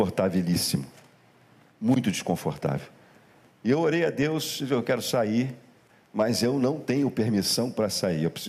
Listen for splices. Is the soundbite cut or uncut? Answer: uncut